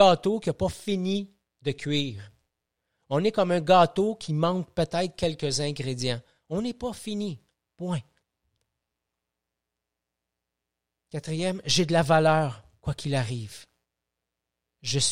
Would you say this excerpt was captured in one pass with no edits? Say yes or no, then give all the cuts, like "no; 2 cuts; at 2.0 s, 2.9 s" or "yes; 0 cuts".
yes; 0 cuts